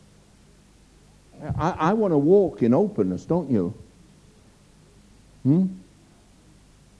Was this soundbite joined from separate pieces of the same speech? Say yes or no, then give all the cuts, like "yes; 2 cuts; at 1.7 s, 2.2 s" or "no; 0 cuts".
no; 0 cuts